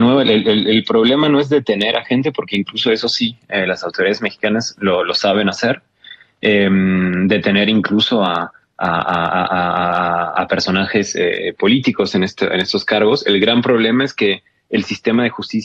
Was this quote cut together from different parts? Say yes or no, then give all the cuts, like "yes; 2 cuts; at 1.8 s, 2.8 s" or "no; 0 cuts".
no; 0 cuts